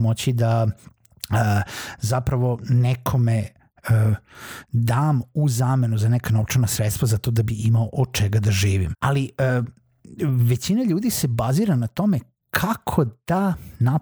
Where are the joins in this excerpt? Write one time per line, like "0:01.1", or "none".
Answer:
0:08.9